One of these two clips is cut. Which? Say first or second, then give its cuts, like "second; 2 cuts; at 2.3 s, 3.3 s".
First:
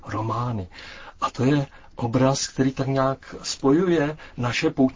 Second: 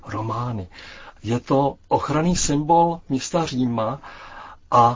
second; 1 cut; at 1.2 s